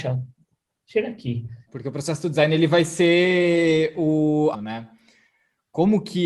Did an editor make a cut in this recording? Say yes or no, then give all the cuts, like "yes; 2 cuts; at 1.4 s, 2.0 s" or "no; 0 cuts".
yes; 2 cuts; at 1.7 s, 4.5 s